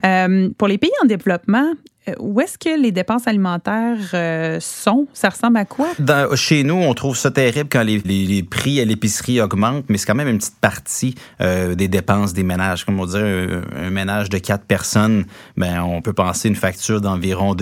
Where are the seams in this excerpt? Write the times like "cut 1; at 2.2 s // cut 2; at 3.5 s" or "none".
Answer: cut 1; at 8.0 s